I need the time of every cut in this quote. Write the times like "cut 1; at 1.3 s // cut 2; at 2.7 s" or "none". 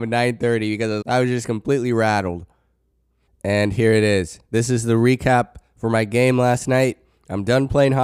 cut 1; at 1.0 s // cut 2; at 3.3 s